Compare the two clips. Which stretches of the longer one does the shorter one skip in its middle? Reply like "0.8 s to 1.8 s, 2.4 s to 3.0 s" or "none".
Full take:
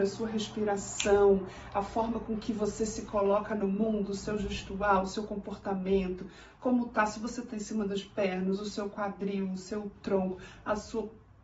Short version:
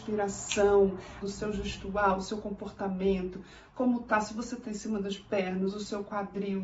1.7 s to 4.1 s

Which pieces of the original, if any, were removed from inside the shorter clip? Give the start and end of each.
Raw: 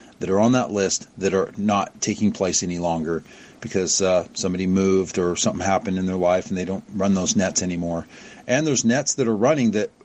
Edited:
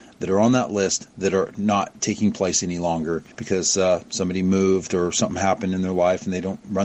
3.3 s to 3.6 s

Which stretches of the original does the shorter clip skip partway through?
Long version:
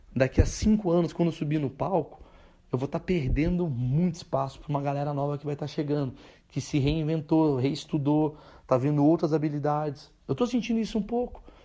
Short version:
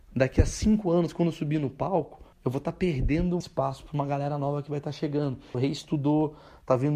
2.3 s to 2.6 s, 3.7 s to 4.2 s, 6.3 s to 7.6 s

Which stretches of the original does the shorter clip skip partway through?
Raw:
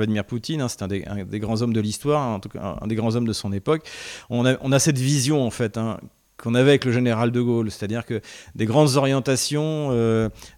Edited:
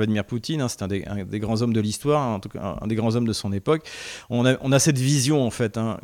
none

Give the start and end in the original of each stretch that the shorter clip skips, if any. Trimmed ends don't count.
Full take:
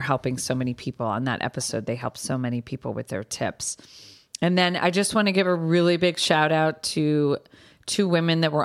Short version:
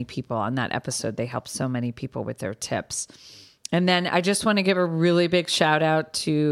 none

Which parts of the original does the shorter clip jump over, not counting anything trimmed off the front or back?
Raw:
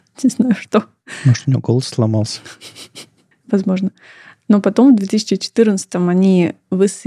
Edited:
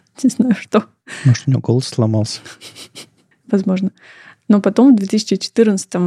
none

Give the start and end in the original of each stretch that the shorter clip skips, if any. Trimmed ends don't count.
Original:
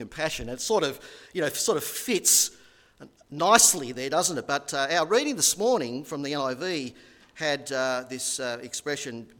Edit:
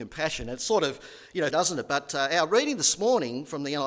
1.5 s to 4.1 s

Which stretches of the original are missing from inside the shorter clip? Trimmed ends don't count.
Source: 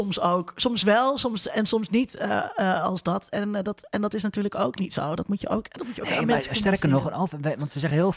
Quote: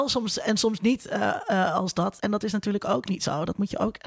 3.3 s to 3.9 s

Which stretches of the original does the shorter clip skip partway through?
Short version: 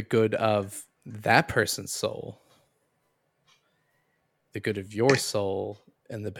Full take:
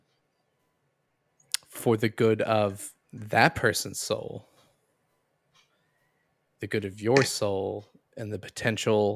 none

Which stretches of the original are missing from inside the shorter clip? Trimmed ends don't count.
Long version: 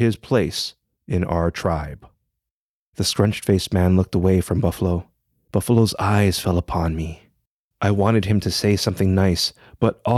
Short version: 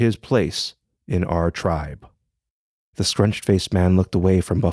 none

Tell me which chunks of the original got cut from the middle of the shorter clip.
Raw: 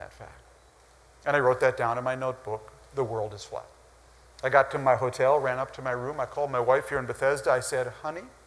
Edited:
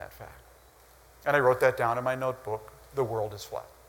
none

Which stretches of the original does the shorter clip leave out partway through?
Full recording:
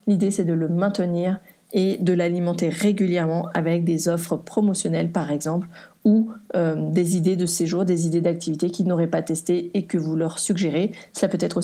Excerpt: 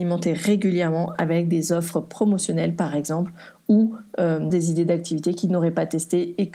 6.9 s to 7.9 s

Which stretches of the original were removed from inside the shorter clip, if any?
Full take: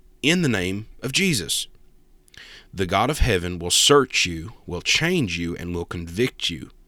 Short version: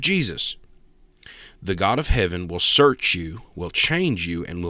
none

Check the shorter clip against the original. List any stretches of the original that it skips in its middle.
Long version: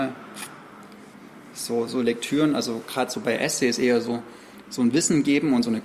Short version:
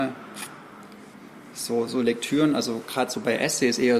none

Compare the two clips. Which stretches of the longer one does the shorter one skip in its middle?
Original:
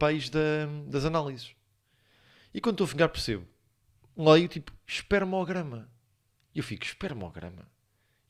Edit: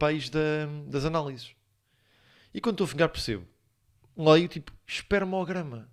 none

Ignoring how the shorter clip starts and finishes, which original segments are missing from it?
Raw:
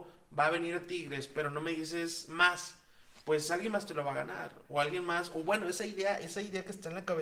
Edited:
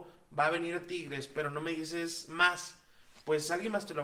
none

